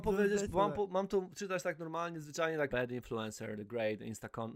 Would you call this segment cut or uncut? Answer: cut